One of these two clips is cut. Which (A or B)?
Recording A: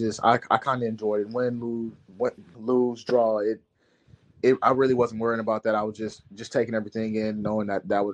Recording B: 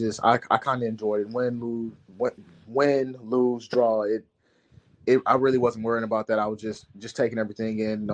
A